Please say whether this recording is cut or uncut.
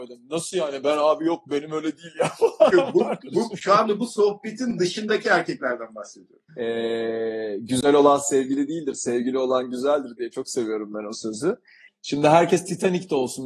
cut